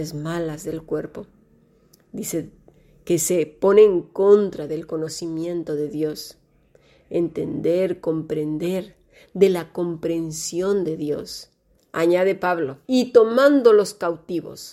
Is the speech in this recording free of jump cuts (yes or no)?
no